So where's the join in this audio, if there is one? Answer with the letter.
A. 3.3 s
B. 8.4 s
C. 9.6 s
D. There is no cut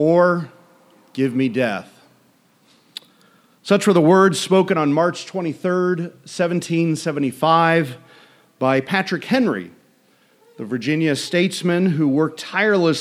D